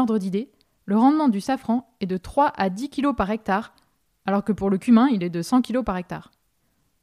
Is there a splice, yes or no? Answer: no